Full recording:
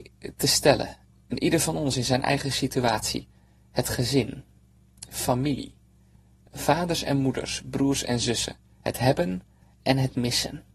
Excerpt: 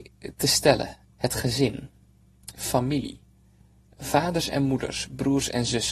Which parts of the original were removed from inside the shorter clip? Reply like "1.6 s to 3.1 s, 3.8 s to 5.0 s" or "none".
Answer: 1.2 s to 3.7 s